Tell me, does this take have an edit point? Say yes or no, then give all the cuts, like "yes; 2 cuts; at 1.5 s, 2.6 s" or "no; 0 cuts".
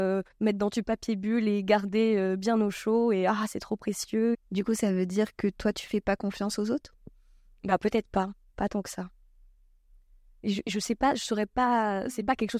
yes; 1 cut; at 4.3 s